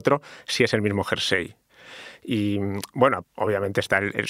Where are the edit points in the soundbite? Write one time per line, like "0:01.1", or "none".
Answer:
0:03.2